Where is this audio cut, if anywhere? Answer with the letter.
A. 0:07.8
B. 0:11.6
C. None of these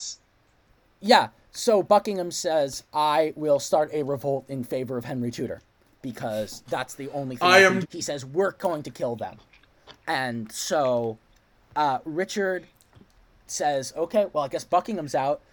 A